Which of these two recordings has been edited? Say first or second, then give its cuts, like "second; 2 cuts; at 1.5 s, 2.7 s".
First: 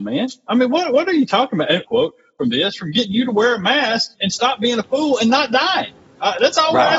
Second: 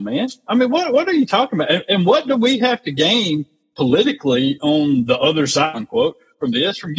first; 2 cuts; at 1.8 s, 4.1 s